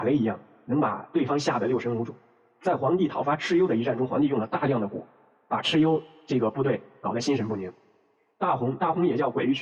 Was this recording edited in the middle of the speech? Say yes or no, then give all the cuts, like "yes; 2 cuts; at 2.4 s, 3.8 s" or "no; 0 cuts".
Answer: no; 0 cuts